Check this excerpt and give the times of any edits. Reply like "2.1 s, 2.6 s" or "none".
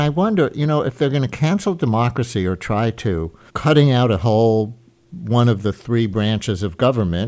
3.5 s